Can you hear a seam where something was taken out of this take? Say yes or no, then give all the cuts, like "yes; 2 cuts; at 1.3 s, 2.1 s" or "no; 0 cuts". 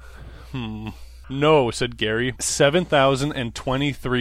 yes; 2 cuts; at 1.2 s, 2.4 s